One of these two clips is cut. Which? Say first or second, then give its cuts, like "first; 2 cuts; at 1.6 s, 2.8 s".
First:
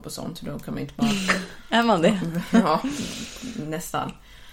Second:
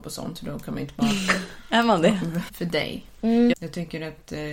second; 2 cuts; at 2.5 s, 3.5 s